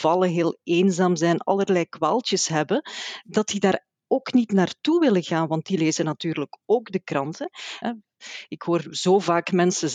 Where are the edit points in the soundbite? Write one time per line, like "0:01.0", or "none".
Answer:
0:07.8

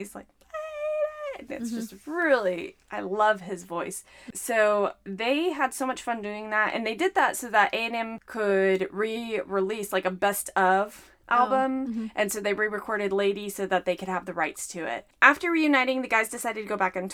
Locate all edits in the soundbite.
none

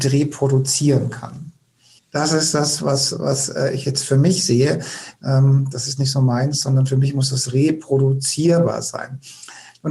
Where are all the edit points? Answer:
0:02.0
0:05.2

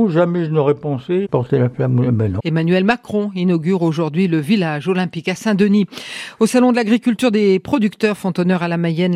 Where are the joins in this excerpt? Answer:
0:01.2
0:02.4

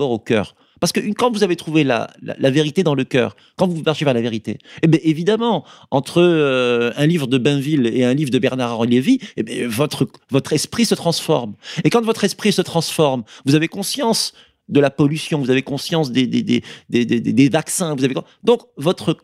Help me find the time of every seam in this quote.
none

